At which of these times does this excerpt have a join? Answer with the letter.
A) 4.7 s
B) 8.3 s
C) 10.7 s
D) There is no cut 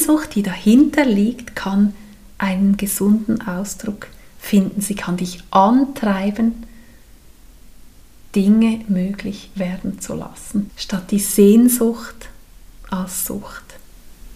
C